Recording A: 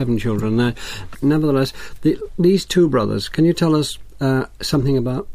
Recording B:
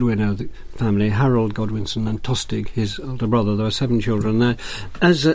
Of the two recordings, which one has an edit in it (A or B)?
A